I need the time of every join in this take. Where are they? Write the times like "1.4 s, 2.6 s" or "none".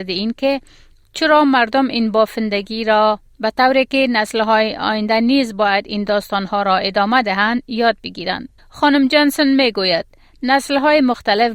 8.6 s